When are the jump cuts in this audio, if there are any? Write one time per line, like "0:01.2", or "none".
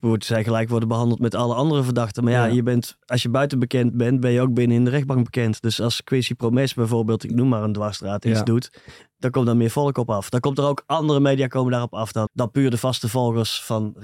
0:12.3